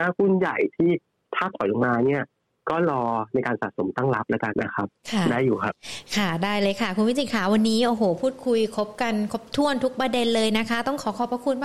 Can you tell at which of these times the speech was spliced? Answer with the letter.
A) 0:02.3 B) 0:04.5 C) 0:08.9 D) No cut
B